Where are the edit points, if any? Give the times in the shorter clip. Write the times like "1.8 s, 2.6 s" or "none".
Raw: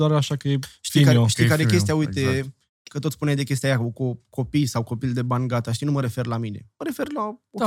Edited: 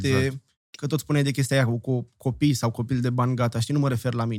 none